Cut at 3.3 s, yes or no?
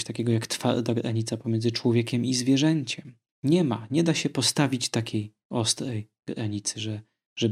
yes